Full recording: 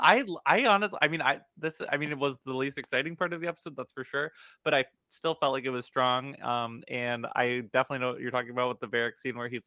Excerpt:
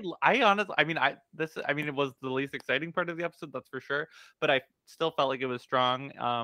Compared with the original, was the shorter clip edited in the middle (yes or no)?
no